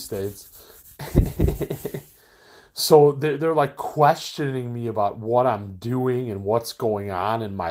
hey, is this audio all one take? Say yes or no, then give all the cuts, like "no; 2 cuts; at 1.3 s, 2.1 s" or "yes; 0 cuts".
yes; 0 cuts